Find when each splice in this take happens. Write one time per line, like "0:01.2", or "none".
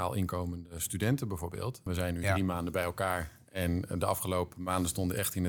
0:01.9

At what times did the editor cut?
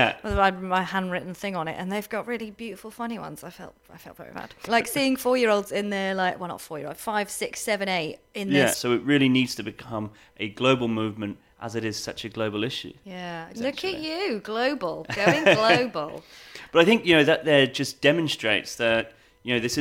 0:04.7
0:08.7
0:13.5

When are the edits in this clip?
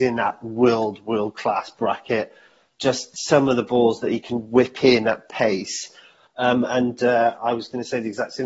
0:06.3

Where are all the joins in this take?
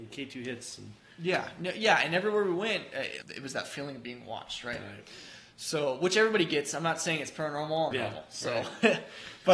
0:03.2
0:07.9

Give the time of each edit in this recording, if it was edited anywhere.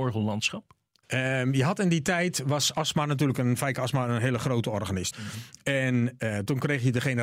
0:01.0
0:05.1

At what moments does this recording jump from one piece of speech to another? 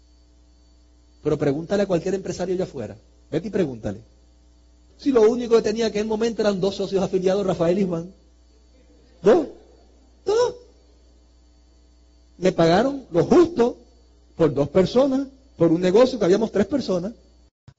0:04.9

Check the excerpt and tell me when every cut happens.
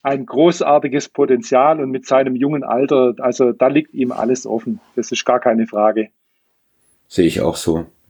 none

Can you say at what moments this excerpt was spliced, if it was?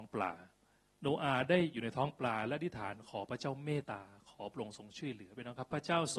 0:03.8

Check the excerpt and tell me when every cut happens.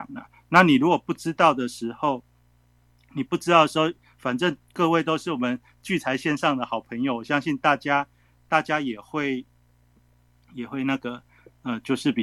none

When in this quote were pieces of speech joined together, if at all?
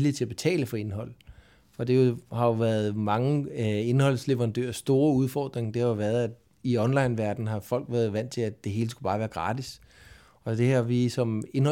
none

